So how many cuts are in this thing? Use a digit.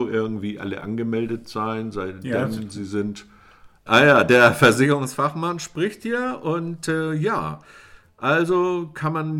1